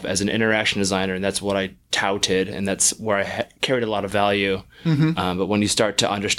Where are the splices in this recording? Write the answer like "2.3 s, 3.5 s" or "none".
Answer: none

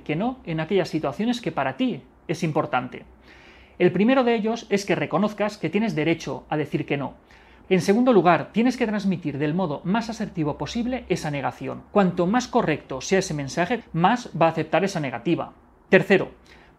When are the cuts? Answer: 7.6 s, 11.9 s, 13.8 s

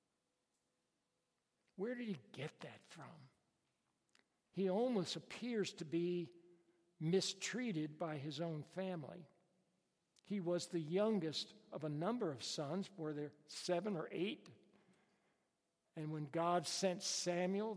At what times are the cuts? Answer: none

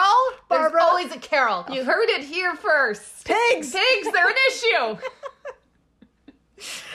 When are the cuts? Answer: 1.7 s

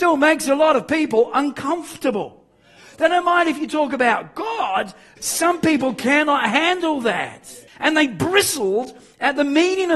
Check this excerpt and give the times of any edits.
5.2 s, 7.7 s

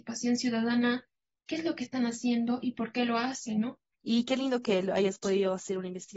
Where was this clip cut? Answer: 3.9 s

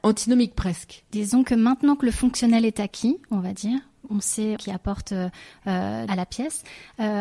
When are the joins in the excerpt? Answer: 4.6 s, 6.1 s

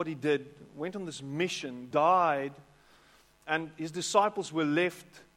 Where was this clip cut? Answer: 1.9 s

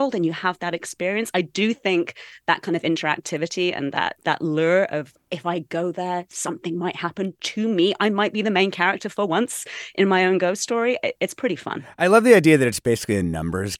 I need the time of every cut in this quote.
none

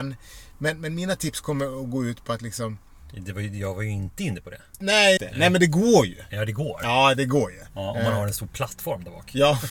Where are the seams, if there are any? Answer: 5.2 s

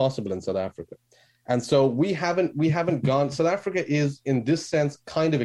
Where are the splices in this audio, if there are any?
none

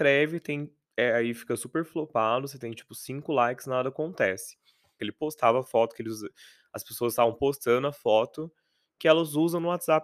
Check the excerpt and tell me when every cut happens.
5.0 s

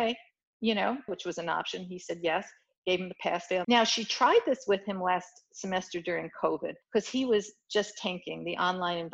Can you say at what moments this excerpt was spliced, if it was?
1.1 s, 3.6 s, 6.8 s

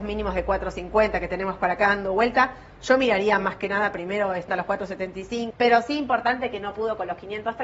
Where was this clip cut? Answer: 4.5 s, 5.5 s

